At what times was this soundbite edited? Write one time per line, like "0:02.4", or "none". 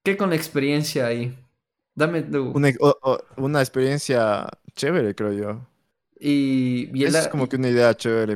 none